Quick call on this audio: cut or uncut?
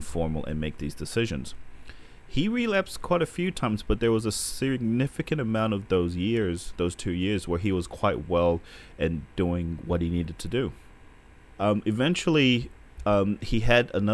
cut